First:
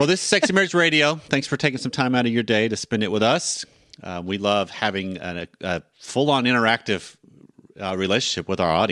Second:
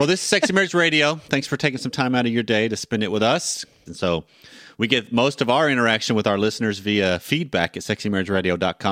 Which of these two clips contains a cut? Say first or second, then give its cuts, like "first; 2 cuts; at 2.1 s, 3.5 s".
second; 1 cut; at 3.9 s